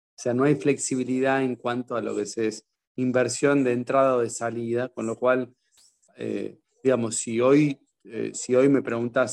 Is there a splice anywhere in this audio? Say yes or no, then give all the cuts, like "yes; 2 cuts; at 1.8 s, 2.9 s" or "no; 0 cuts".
no; 0 cuts